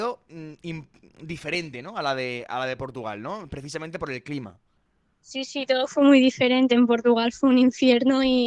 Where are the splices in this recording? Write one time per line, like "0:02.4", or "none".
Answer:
0:03.5